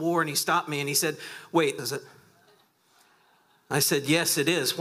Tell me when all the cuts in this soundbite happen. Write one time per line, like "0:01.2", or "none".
0:01.8

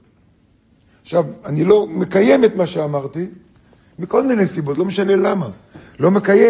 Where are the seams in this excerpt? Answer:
none

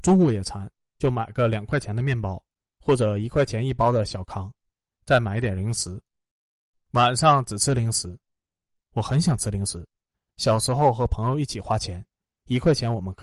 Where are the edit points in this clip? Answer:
none

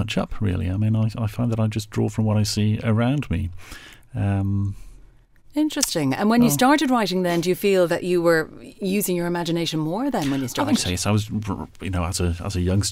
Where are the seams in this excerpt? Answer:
none

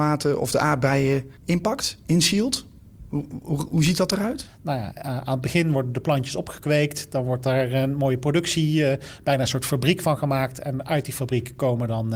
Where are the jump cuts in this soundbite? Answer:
0:01.4

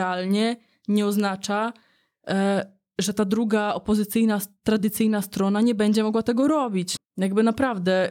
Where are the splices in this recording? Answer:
0:07.0

